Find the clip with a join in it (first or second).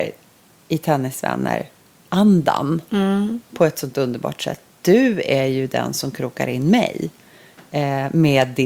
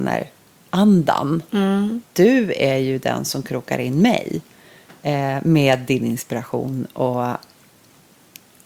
second